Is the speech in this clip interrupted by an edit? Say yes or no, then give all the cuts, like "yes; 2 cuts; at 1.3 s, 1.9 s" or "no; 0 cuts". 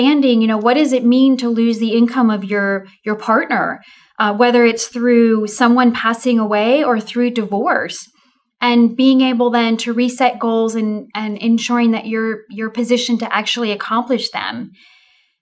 no; 0 cuts